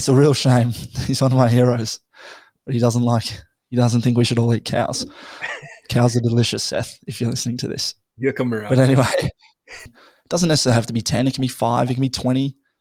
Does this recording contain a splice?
yes; 1 cut; at 9.9 s

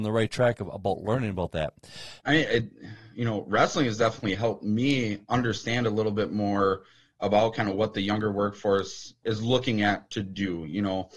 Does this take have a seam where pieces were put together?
yes; 2 cuts; at 2.2 s, 9.2 s

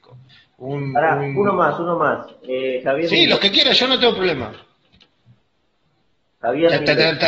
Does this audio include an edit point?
no; 0 cuts

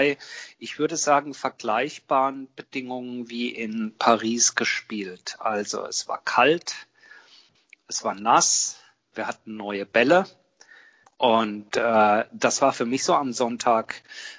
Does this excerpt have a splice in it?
yes; 1 cut; at 11.0 s

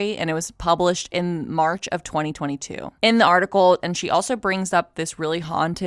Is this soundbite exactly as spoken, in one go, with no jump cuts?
no; 1 cut; at 3.8 s

